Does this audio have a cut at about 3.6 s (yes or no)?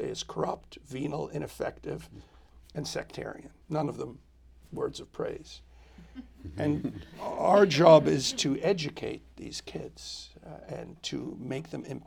yes